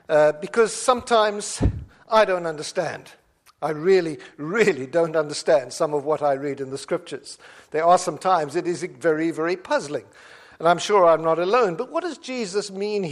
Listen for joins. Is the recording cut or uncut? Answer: uncut